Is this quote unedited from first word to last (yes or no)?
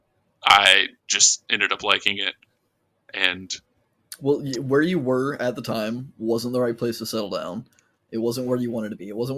yes